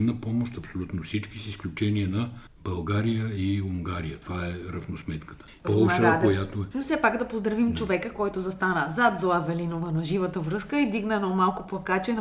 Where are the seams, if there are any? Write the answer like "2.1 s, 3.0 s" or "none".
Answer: 5.6 s, 6.7 s